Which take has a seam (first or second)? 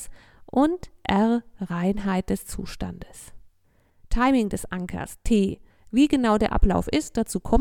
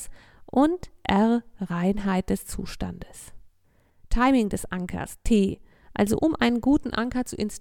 first